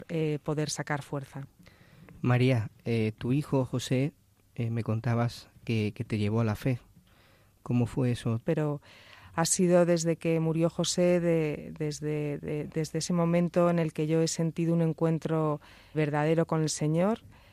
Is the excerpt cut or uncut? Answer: cut